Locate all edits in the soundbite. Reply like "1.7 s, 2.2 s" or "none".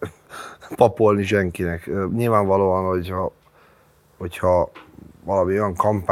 none